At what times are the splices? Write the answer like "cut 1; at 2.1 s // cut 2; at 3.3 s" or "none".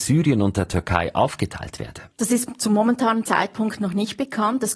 cut 1; at 2.1 s